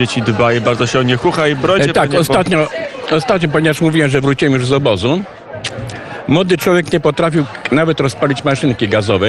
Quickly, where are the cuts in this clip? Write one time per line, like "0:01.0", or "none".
none